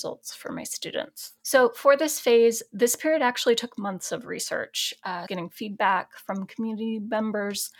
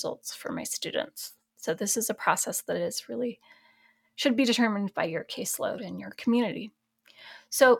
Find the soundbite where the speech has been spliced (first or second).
first